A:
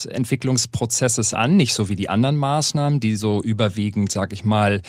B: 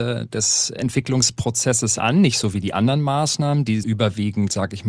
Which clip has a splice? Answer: B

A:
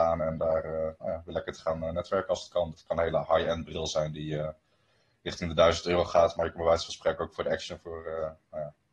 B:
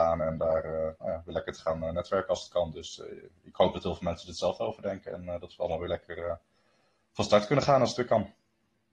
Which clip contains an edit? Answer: A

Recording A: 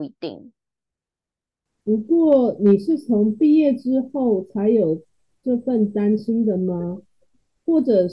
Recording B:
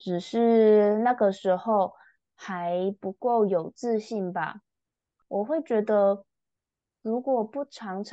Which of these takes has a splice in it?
A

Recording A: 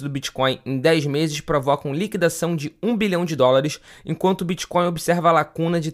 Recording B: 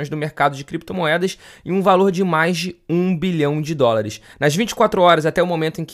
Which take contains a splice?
B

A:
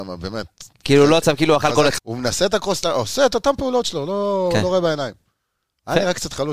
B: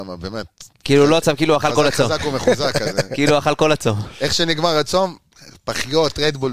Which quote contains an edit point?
A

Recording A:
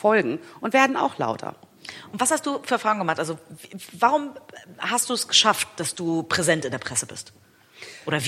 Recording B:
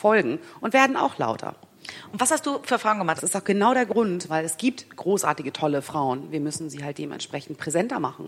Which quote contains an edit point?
B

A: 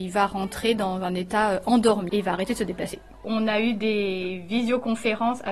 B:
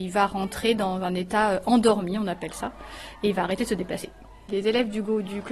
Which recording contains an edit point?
A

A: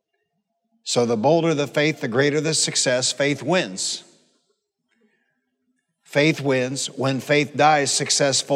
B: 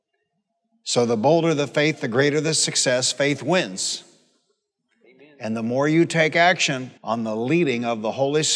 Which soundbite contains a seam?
B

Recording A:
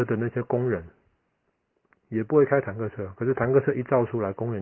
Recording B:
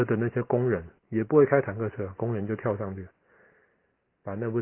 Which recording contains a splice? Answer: B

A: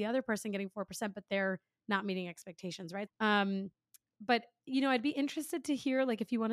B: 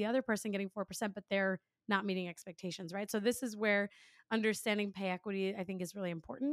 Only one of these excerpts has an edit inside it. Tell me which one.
A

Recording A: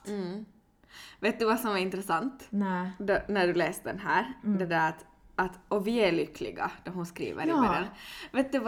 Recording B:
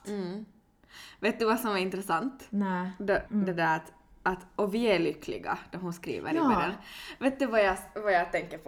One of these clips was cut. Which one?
B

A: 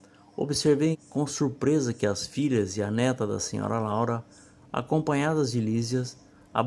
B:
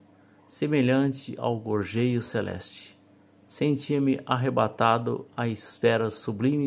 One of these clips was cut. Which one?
A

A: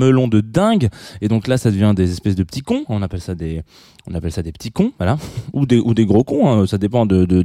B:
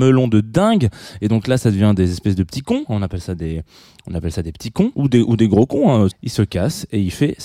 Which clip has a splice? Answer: B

